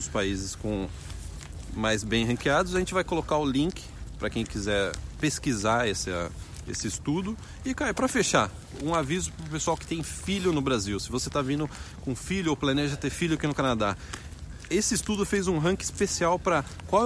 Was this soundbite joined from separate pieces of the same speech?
no; 0 cuts

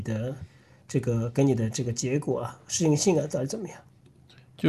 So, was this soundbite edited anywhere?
no; 0 cuts

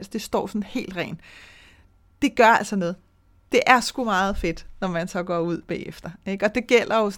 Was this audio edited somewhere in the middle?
no; 0 cuts

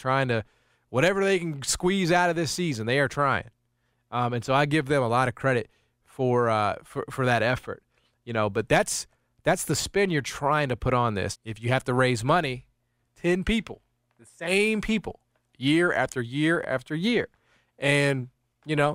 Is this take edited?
yes; 2 cuts; at 11.3 s, 13.1 s

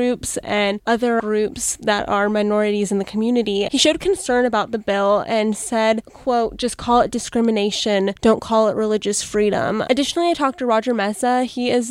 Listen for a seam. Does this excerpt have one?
no; 0 cuts

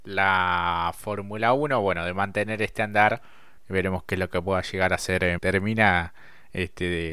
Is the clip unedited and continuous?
no; 2 cuts; at 3.6 s, 5.4 s

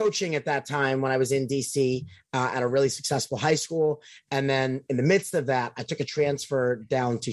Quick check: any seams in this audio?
no; 0 cuts

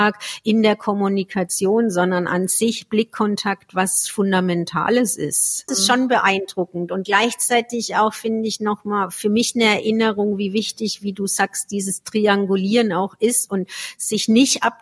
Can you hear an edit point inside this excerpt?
yes; 1 cut; at 5.7 s

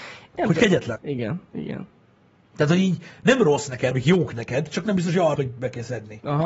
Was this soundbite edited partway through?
yes; 3 cuts; at 1.0 s, 3.9 s, 5.4 s

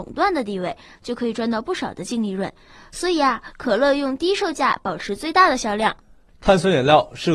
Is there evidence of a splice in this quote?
no; 0 cuts

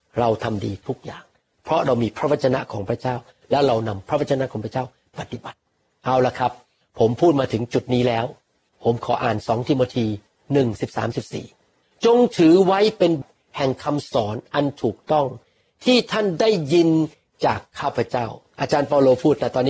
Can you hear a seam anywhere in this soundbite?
yes; 2 cuts; at 5.1 s, 13.2 s

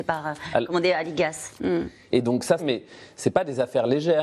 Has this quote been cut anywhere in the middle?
yes; 2 cuts; at 1.6 s, 2.6 s

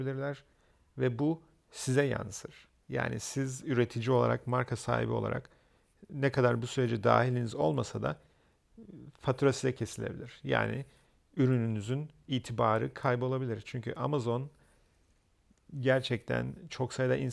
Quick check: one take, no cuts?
yes; 0 cuts

